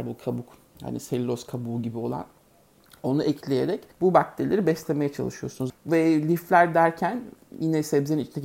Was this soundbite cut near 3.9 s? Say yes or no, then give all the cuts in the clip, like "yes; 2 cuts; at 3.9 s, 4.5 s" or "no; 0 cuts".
yes; 2 cuts; at 3.9 s, 5.7 s